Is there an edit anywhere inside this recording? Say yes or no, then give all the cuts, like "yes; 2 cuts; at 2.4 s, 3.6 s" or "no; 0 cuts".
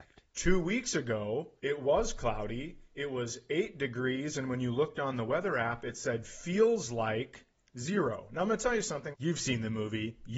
yes; 2 cuts; at 1.6 s, 9.1 s